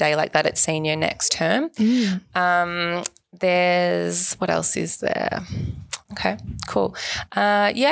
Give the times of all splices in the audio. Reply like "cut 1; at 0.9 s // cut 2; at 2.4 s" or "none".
cut 1; at 6.0 s